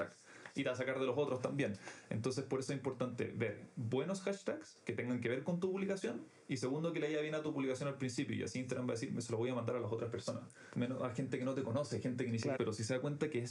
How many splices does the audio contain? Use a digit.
2